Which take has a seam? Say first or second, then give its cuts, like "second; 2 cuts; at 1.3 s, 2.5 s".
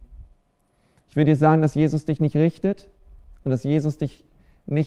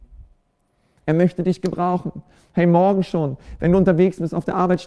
second; 1 cut; at 1.0 s